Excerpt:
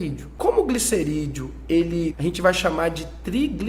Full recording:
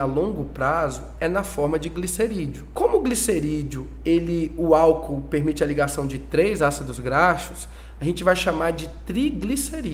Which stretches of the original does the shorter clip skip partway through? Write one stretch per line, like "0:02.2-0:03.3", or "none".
0:04.5-0:07.9